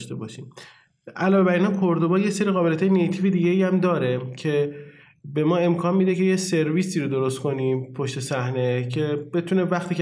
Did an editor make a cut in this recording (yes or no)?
no